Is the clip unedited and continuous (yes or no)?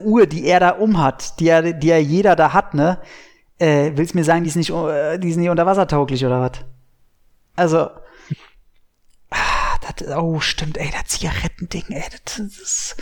yes